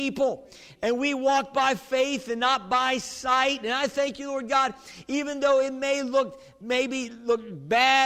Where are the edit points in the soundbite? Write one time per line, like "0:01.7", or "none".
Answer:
none